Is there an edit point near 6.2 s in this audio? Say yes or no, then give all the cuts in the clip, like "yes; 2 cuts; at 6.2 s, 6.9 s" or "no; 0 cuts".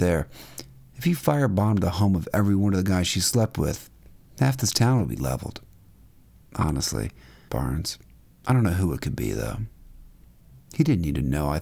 no; 1 cut; at 7.5 s